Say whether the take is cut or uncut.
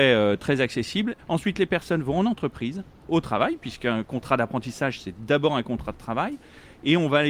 cut